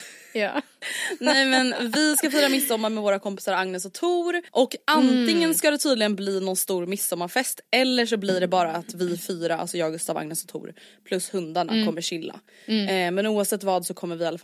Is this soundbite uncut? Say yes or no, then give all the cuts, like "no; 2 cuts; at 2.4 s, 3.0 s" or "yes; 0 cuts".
no; 1 cut; at 4.5 s